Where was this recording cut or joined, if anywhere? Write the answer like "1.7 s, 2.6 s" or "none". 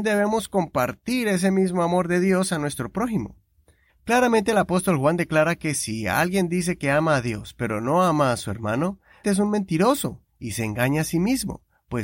3.9 s, 9.2 s